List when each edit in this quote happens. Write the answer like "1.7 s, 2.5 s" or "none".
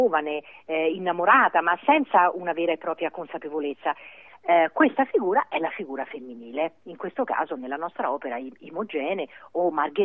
4.3 s